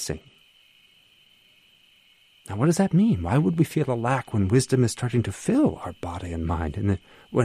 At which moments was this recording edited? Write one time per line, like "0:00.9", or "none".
none